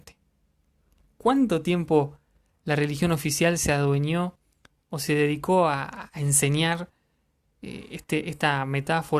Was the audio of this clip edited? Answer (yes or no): no